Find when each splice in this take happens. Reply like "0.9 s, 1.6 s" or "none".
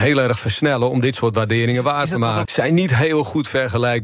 2.4 s

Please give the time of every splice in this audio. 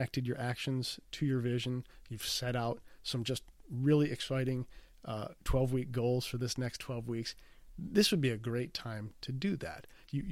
none

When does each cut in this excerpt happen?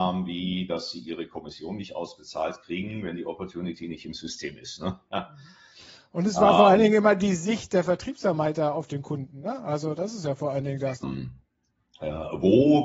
11.0 s

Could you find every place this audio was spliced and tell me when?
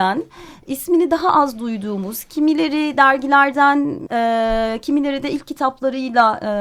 4.1 s

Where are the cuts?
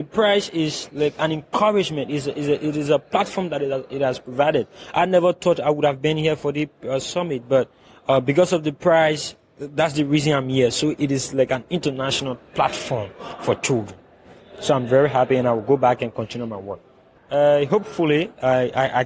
17.2 s

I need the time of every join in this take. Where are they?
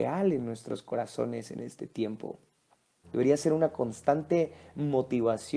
3.0 s

